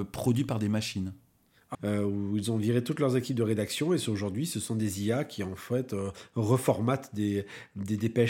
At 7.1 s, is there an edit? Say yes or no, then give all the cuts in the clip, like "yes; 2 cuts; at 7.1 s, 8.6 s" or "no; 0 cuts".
no; 1 cut; at 1.7 s